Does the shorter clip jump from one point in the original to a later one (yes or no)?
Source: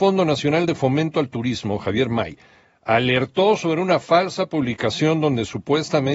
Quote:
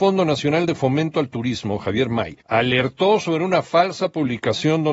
yes